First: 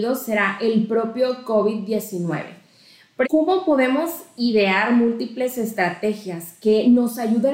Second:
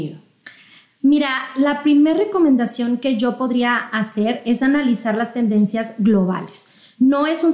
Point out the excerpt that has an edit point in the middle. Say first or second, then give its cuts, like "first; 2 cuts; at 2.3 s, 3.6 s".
first; 1 cut; at 3.2 s